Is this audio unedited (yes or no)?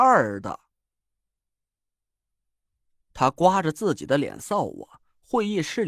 yes